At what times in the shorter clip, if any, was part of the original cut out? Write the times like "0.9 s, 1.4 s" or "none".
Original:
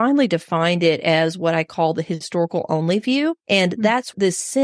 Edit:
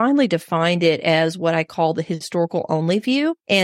none